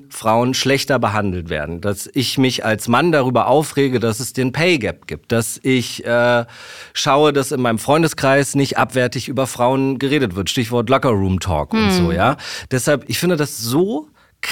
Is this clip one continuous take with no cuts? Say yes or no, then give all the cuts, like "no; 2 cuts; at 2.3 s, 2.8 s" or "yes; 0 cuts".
yes; 0 cuts